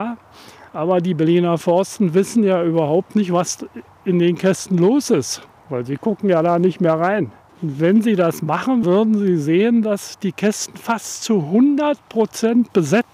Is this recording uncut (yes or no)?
no